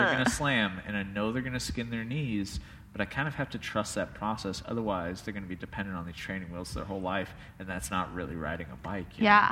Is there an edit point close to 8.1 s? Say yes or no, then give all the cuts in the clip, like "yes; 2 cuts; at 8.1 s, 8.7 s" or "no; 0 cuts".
no; 0 cuts